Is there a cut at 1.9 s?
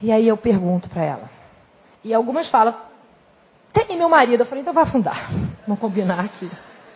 yes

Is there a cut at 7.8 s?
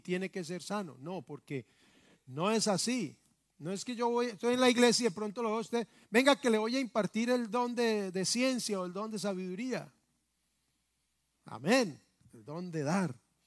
no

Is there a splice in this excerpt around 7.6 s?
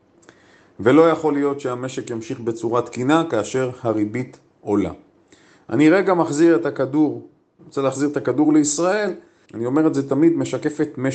yes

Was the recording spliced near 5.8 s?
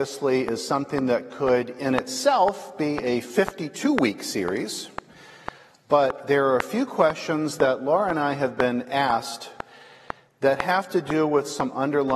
yes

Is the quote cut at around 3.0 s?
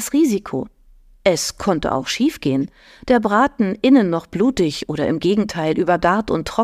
no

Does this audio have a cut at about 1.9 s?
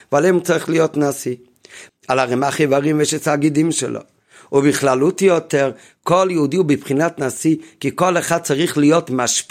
yes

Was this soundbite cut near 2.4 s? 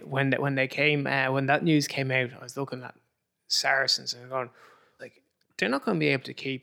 no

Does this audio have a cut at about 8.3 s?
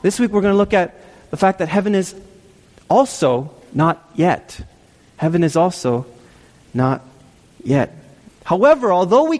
yes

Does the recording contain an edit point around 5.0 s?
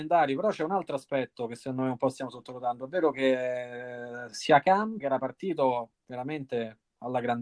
yes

